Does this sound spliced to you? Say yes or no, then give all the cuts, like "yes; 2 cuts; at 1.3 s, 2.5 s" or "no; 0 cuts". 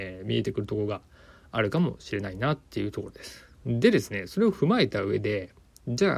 no; 0 cuts